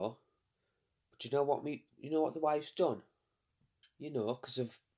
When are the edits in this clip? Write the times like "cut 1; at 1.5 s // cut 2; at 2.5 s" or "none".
cut 1; at 3.8 s